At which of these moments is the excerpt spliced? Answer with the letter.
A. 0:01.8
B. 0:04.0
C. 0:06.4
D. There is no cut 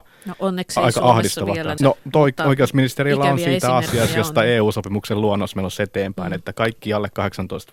A